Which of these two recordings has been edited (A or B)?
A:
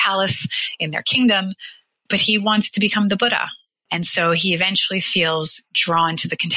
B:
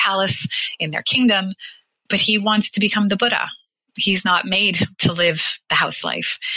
A